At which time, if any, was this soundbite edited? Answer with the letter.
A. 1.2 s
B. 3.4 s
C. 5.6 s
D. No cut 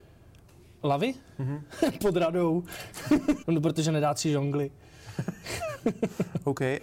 B